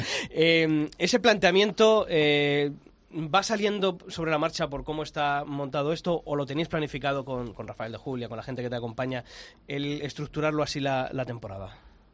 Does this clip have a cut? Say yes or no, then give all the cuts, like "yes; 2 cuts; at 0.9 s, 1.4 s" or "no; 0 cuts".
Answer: no; 0 cuts